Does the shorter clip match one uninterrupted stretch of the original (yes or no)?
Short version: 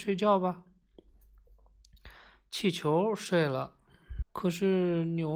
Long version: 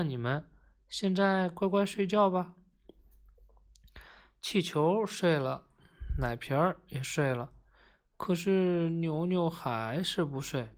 no